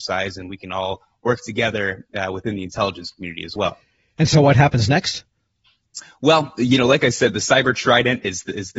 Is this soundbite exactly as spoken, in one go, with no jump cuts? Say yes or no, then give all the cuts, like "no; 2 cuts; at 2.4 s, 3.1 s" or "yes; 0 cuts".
yes; 0 cuts